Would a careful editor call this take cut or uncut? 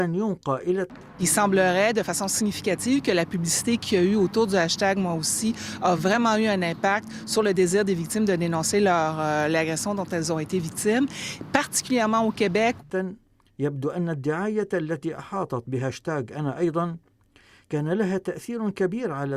uncut